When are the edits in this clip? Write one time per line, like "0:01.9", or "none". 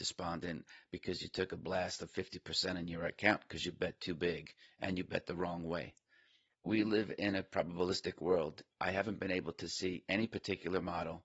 0:06.5
0:08.7